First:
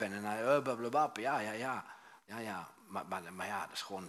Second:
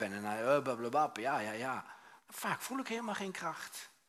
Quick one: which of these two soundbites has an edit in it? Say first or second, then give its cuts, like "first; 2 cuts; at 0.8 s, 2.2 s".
second; 1 cut; at 2.3 s